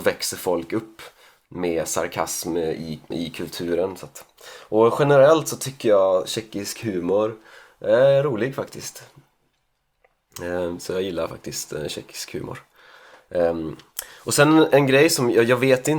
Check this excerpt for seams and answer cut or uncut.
cut